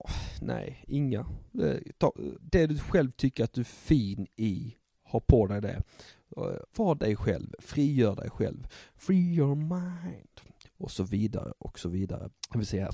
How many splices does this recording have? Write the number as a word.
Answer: two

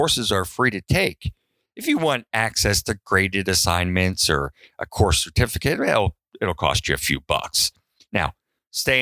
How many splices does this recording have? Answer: zero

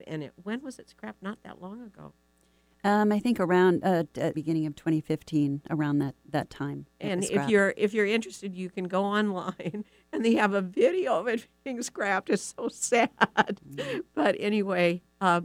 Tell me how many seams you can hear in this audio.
one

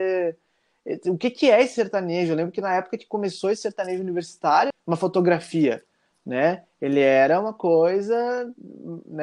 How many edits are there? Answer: one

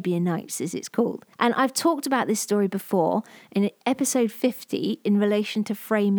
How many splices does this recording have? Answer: one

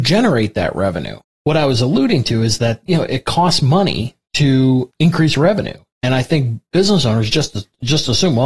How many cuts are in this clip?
one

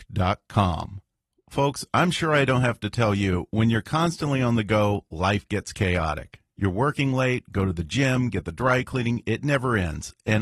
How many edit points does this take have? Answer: zero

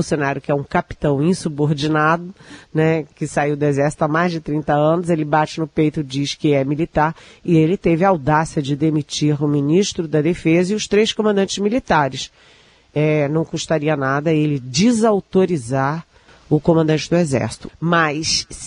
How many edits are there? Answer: two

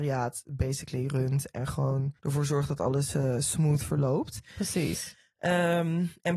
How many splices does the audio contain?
one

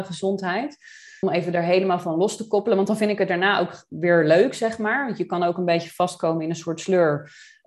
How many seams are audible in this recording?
zero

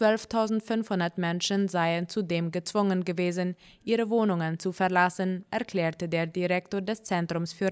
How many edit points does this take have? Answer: zero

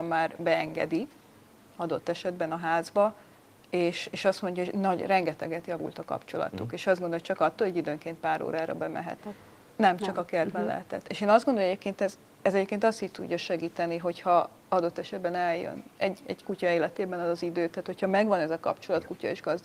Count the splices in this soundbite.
one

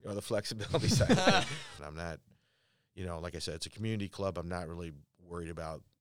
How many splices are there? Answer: one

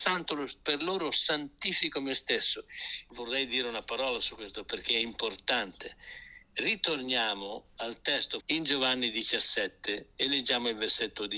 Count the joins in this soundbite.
two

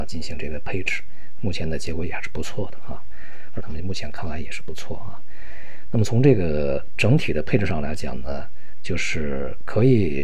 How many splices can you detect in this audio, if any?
one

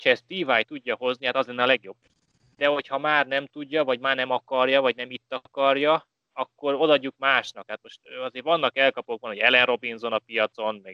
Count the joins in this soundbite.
zero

